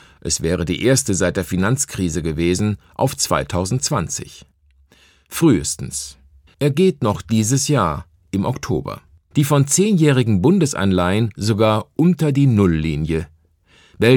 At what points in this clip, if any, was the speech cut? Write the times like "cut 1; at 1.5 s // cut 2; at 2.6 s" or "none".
cut 1; at 6.5 s // cut 2; at 9.3 s